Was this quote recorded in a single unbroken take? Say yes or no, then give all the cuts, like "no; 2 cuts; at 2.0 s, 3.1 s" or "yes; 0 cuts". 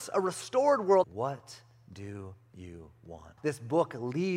no; 2 cuts; at 1.0 s, 3.4 s